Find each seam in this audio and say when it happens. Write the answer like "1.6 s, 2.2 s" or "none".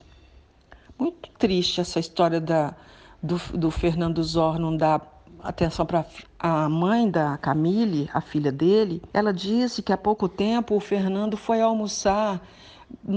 6.2 s, 9.1 s